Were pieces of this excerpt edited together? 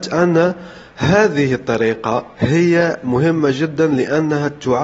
yes; 1 cut; at 2.3 s

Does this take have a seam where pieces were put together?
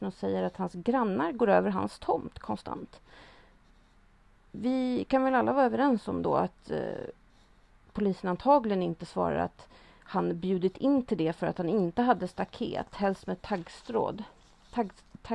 no; 0 cuts

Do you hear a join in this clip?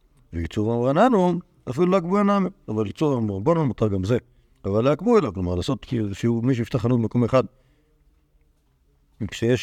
yes; 1 cut; at 4.5 s

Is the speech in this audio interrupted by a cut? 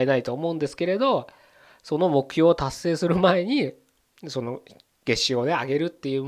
no; 0 cuts

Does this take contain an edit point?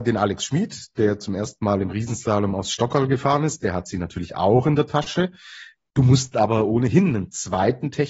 no; 0 cuts

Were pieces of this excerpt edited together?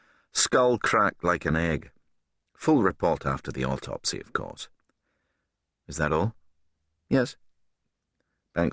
no; 0 cuts

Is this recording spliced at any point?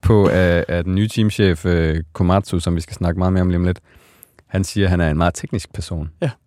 no; 0 cuts

